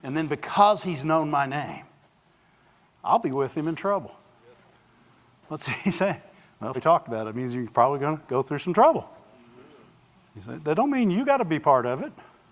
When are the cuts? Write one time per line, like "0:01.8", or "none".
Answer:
0:06.7